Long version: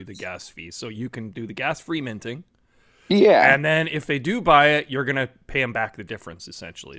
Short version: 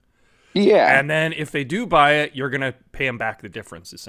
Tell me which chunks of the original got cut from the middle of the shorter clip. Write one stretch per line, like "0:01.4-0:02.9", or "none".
none